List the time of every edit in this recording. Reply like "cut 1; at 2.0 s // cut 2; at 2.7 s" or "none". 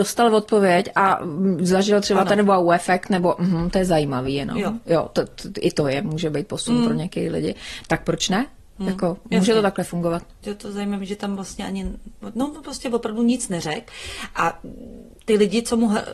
none